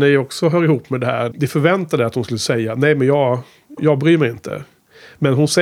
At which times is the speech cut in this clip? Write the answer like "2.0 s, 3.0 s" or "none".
1.3 s, 3.8 s